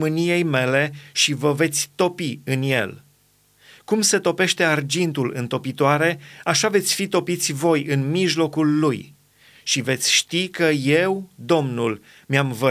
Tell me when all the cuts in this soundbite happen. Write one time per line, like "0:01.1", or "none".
none